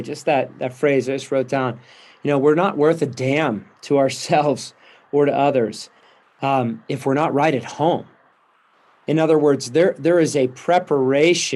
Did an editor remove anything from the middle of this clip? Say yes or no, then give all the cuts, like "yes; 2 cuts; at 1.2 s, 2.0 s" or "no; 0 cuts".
no; 0 cuts